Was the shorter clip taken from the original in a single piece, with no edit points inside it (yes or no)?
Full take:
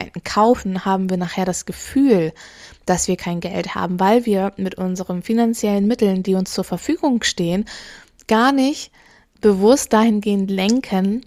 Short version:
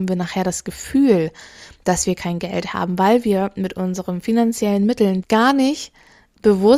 no